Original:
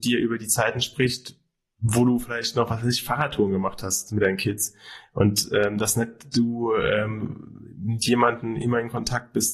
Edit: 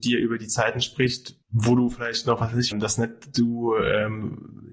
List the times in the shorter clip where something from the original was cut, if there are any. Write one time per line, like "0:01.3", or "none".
0:01.4
0:02.7